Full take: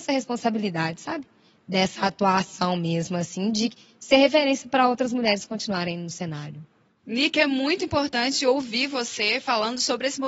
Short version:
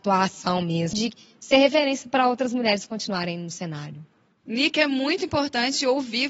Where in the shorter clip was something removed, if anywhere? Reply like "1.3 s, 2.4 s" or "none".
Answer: 0.9 s